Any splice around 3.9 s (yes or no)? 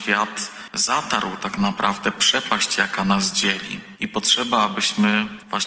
yes